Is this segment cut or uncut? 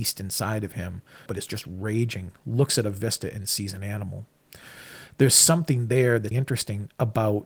cut